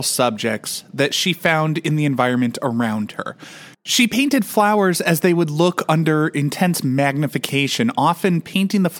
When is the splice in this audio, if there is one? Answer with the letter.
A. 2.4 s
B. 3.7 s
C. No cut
B